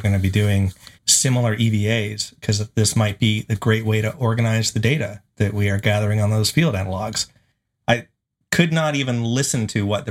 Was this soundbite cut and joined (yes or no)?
yes